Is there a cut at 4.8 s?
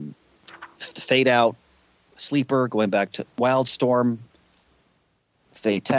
no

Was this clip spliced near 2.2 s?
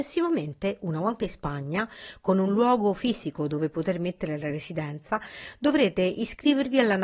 no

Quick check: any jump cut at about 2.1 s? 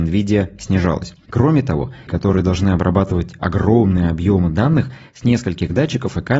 yes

